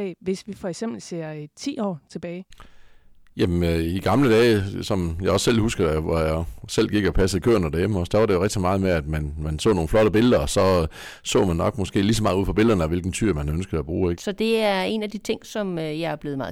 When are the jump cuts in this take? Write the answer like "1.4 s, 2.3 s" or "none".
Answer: 14.1 s